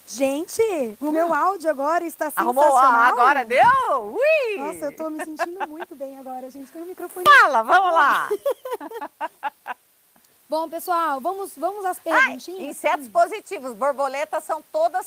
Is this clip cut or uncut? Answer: uncut